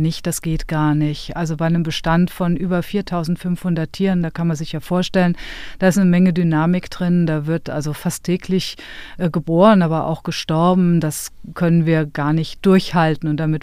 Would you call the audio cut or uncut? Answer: uncut